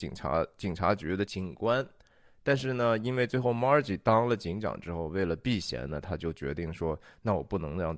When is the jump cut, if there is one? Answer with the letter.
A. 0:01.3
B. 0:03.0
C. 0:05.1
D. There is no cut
A